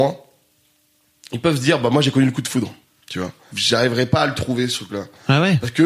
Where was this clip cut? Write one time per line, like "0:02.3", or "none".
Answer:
0:03.5